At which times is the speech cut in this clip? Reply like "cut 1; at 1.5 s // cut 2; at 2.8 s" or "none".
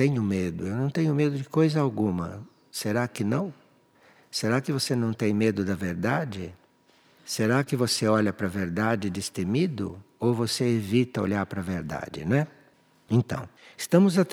none